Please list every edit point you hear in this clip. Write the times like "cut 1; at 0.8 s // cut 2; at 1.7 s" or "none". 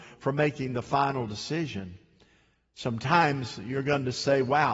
none